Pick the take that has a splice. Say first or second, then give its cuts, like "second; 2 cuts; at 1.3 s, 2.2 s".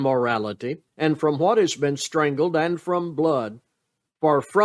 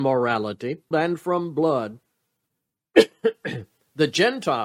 second; 2 cuts; at 0.9 s, 2.5 s